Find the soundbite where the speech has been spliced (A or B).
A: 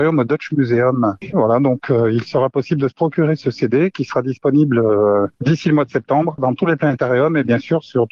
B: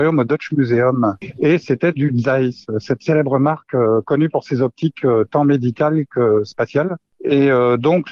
A